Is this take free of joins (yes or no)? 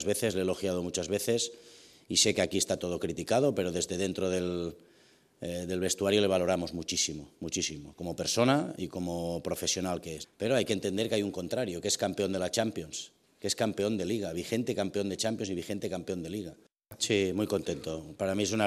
no